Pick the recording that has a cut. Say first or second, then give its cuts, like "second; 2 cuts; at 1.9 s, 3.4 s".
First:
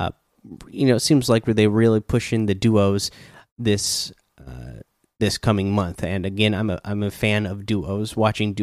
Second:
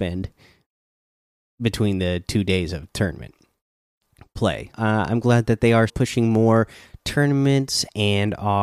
second; 2 cuts; at 4.7 s, 5.9 s